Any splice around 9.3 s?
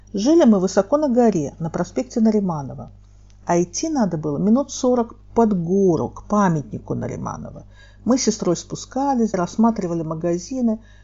yes; 1 cut; at 9.3 s

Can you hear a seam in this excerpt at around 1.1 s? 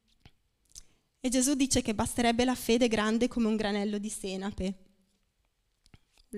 no; 0 cuts

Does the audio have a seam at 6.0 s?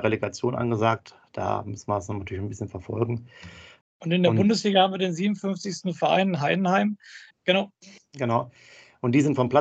no; 2 cuts; at 3.8 s, 7.3 s

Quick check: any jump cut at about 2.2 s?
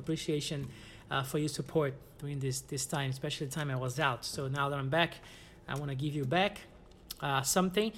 yes; 1 cut; at 2.2 s

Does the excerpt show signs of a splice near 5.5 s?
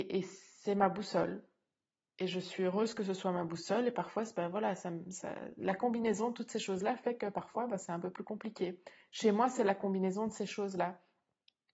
no; 0 cuts

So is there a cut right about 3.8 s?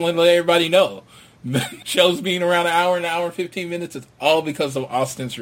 no; 1 cut; at 1.8 s

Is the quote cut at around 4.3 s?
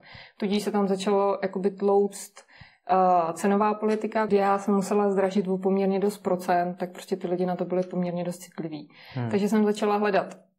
yes; 1 cut; at 4.3 s

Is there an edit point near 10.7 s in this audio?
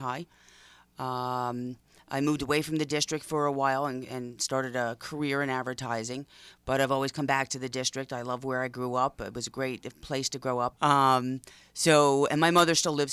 yes; 1 cut; at 10.7 s

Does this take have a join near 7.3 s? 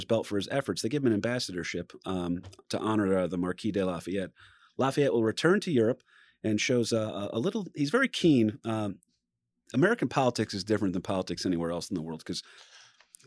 no; 0 cuts

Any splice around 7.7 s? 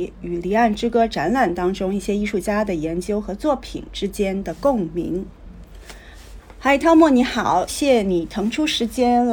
yes; 1 cut; at 7.7 s

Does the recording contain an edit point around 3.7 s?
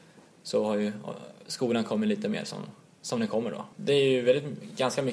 yes; 1 cut; at 3.7 s

